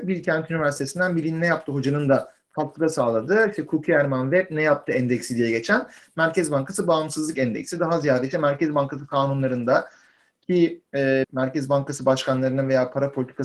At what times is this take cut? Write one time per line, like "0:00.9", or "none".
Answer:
0:11.2